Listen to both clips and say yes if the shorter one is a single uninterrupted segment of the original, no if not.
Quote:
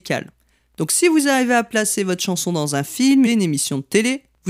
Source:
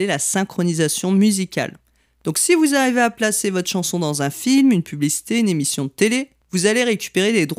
no